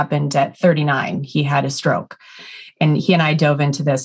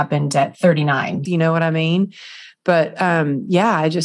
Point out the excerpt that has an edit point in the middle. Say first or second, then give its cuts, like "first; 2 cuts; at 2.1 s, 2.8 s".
second; 1 cut; at 1.3 s